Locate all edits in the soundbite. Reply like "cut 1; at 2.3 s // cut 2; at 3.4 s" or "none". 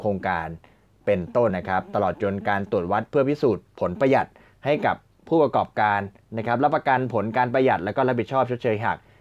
cut 1; at 1.5 s